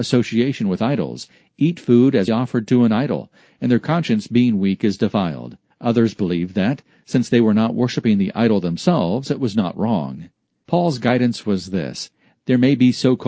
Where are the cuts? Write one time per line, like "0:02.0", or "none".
0:02.3
0:05.7